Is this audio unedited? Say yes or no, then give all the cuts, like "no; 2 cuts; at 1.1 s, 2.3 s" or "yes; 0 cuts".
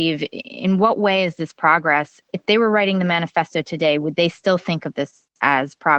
no; 1 cut; at 2.2 s